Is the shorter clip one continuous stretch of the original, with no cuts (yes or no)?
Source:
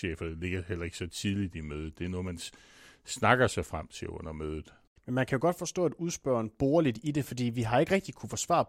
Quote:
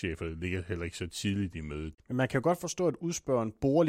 no